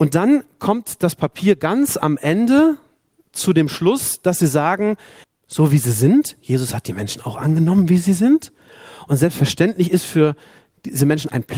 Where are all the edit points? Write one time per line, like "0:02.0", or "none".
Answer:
0:05.2